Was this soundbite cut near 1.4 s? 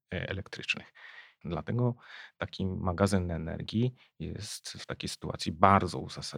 yes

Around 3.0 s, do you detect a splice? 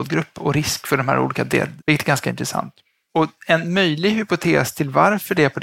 no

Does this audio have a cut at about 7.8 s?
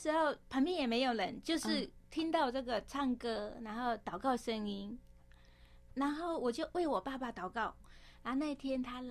yes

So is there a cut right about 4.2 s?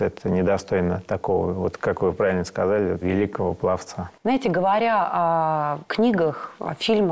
yes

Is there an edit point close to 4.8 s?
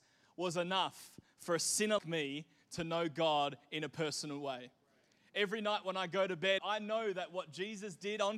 no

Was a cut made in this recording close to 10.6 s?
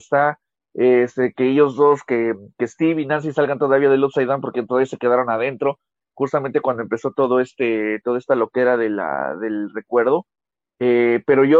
no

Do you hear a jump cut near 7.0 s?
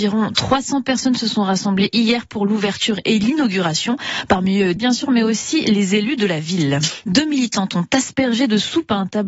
yes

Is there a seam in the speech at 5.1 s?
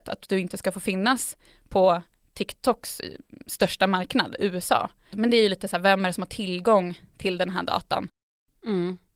yes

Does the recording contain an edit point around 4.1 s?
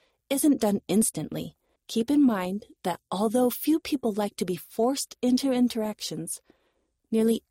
no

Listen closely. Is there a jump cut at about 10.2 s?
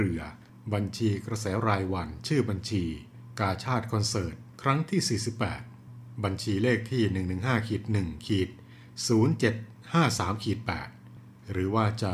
yes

